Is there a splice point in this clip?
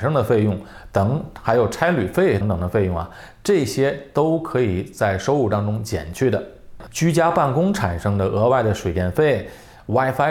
yes; 2 cuts; at 2.4 s, 6.9 s

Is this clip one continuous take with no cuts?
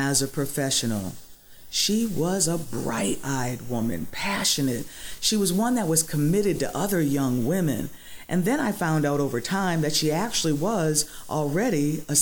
yes; 0 cuts

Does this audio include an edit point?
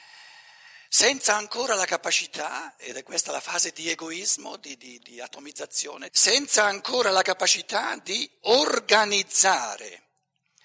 yes; 2 cuts; at 5.0 s, 6.1 s

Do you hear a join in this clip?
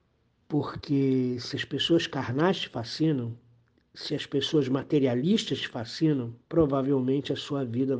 yes; 1 cut; at 6.4 s

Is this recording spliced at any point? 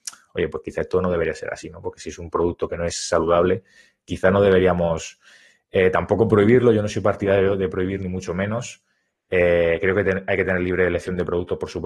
no; 0 cuts

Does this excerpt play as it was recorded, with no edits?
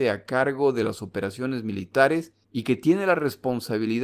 no; 1 cut; at 2.4 s

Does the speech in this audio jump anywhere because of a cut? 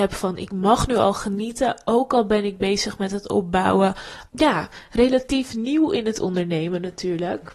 yes; 1 cut; at 4.3 s

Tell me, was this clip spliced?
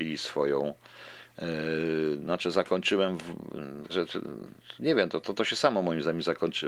yes; 1 cut; at 3.9 s

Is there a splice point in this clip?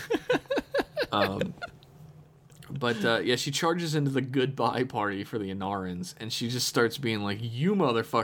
no; 0 cuts

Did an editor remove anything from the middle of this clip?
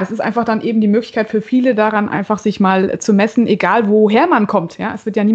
no; 0 cuts

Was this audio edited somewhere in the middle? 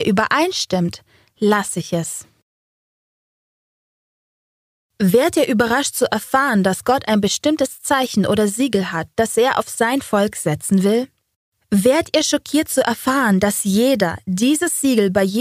no; 0 cuts

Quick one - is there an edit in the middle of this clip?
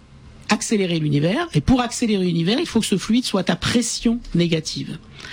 no; 0 cuts

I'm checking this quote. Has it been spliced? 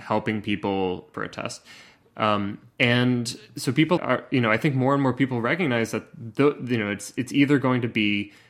yes; 2 cuts; at 1.1 s, 4.0 s

